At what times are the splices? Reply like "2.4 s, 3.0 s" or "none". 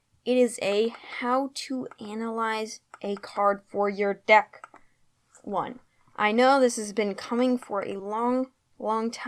none